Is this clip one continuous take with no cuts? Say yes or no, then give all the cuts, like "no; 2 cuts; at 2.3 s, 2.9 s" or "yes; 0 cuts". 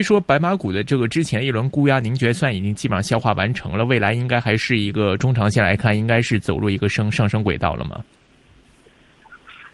yes; 0 cuts